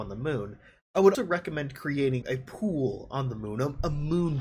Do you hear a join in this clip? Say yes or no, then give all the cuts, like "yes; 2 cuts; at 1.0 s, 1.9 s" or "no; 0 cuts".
yes; 2 cuts; at 1.1 s, 2.2 s